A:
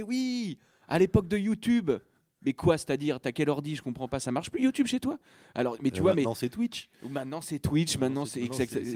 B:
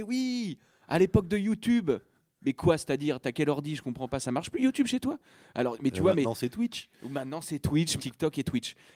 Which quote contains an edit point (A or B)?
B